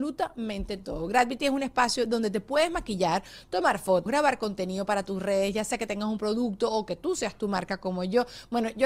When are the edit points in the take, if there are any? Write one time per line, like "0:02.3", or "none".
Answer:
0:04.1